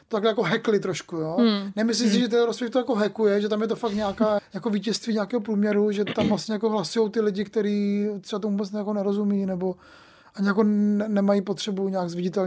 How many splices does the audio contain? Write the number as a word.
one